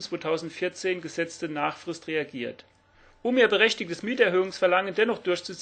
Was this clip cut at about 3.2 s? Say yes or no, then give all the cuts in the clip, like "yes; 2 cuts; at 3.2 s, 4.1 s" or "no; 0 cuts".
no; 0 cuts